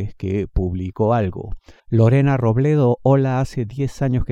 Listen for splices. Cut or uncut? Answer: cut